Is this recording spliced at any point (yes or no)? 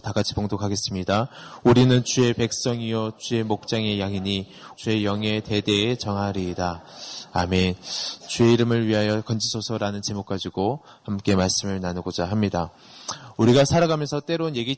yes